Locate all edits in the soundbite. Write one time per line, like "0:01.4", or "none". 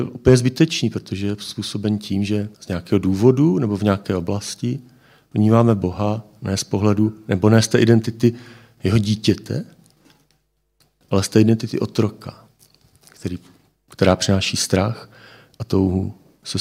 0:02.5
0:11.0